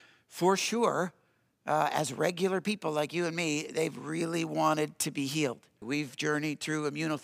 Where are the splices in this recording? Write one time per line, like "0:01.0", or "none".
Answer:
0:05.8

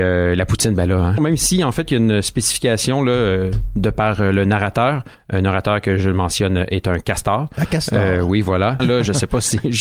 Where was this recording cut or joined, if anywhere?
0:01.2
0:08.8

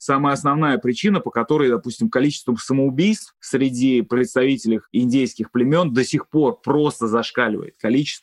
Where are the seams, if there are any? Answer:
none

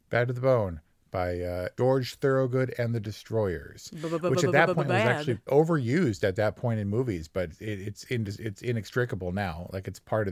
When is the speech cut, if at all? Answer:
0:05.5

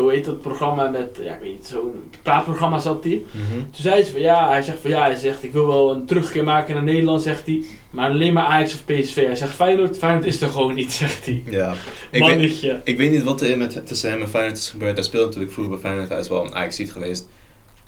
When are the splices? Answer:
none

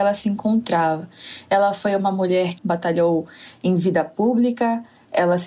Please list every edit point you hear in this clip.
0:02.6

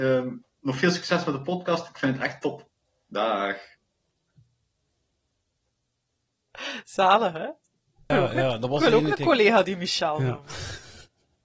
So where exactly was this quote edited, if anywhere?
0:08.1

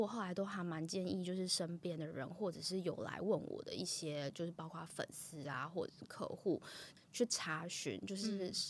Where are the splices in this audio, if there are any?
none

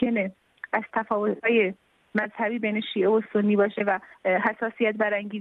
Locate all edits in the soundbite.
0:04.1

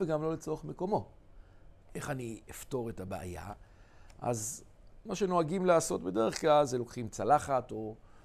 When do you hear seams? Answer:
0:01.8

